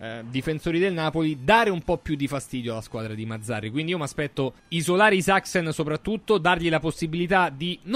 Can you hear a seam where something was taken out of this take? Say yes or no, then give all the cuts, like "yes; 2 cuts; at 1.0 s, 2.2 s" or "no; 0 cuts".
yes; 1 cut; at 4.6 s